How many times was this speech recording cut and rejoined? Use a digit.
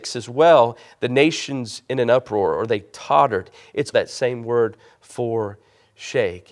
1